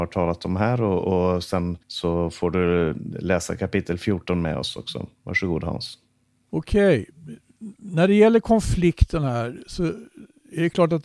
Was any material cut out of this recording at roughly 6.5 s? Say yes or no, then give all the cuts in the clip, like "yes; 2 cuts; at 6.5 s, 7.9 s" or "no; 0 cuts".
no; 1 cut; at 1.8 s